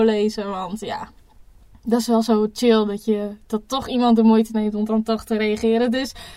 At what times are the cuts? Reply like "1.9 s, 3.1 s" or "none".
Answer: none